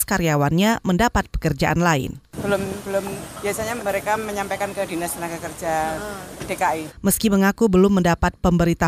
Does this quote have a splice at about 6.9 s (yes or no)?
yes